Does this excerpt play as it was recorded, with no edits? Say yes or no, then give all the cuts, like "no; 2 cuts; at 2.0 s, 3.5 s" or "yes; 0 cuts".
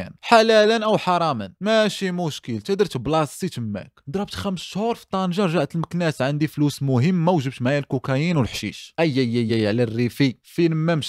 no; 1 cut; at 9.5 s